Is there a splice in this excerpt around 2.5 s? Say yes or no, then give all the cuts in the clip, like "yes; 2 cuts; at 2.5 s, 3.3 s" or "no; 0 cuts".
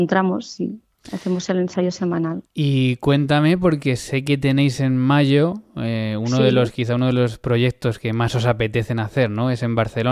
no; 0 cuts